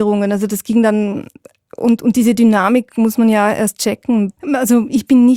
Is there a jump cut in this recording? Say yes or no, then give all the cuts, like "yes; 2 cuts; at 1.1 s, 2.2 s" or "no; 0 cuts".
no; 0 cuts